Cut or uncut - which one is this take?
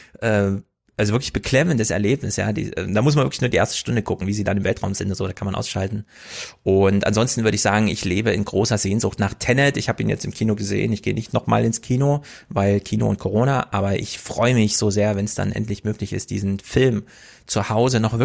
uncut